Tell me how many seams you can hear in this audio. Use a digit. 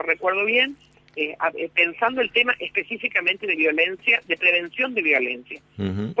0